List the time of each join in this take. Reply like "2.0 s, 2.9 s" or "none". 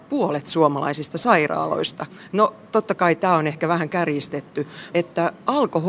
4.9 s